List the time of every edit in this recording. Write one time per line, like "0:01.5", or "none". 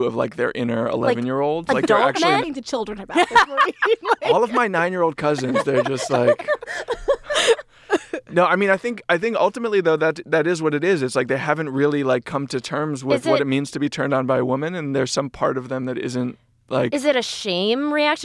0:02.4